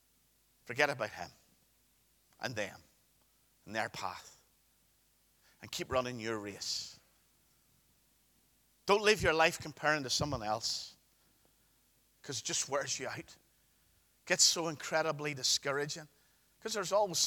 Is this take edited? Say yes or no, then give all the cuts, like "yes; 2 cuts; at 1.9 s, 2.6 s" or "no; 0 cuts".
no; 0 cuts